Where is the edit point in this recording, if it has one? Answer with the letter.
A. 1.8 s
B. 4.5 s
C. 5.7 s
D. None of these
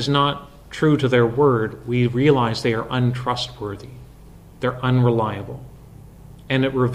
D